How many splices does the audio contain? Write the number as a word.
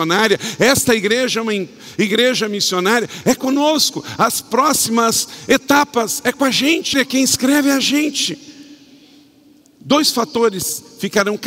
one